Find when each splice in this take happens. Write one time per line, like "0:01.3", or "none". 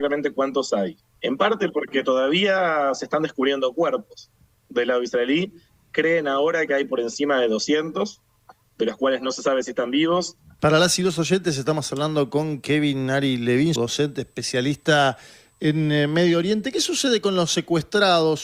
0:01.2
0:10.6
0:13.8

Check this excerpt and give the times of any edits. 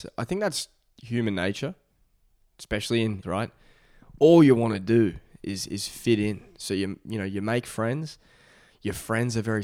0:03.2

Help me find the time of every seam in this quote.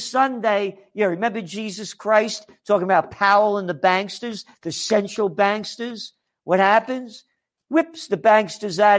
none

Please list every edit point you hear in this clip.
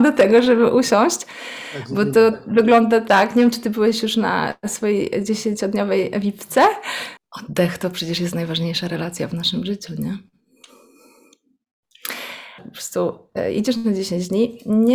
0:07.2
0:12.6

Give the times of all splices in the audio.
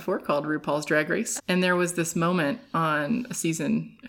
0:01.4

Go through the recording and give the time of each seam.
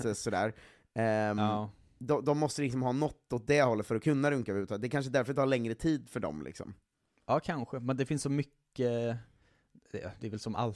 none

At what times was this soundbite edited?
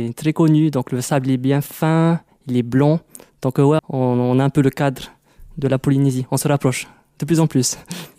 0:03.8

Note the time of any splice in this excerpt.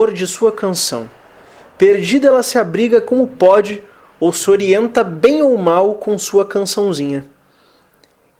none

